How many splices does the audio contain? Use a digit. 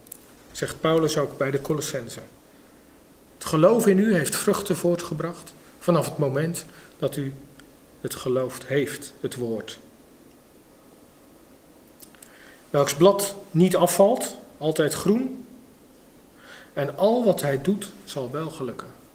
0